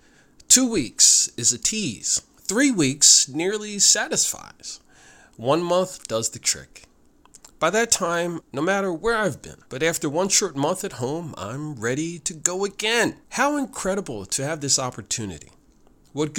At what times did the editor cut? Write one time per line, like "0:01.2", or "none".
0:08.4
0:09.7
0:13.2